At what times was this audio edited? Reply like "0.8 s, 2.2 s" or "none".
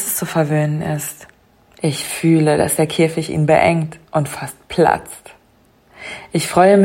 1.8 s